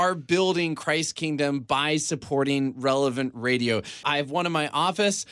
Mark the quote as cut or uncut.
cut